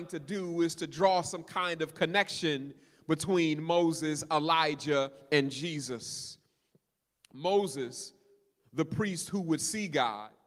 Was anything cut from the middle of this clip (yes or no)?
no